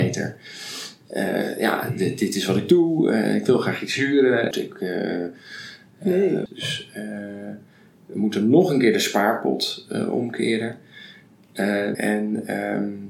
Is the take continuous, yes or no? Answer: no